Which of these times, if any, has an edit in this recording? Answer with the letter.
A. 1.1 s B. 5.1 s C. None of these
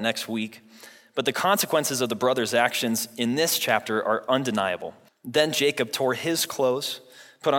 B